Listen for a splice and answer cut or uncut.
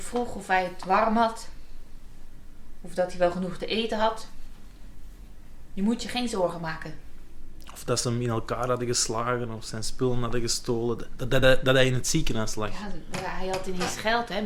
uncut